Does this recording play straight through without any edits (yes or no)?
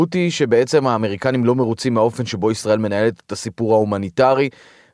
yes